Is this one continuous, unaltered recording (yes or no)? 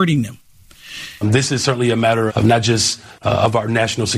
no